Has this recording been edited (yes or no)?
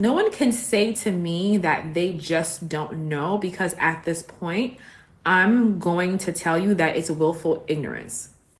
no